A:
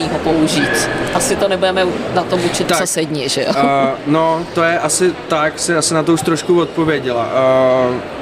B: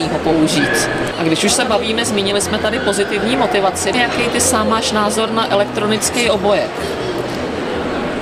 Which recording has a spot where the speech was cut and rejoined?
B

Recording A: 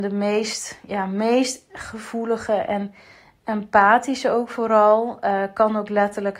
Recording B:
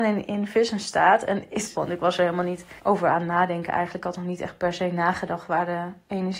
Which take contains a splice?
B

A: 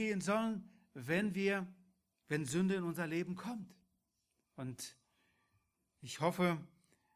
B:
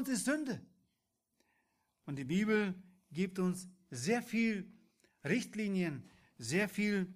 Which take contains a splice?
A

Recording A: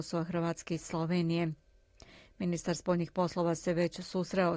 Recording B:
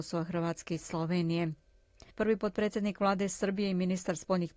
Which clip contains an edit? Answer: B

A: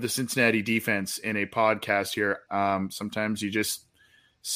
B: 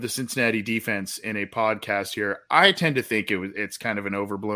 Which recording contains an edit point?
A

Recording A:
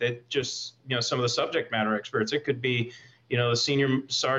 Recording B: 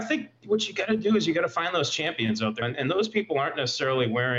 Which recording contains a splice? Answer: B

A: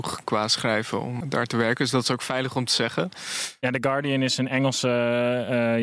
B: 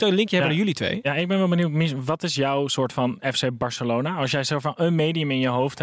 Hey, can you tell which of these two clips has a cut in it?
A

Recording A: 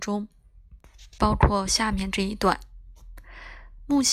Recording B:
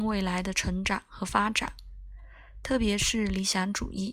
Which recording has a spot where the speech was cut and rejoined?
A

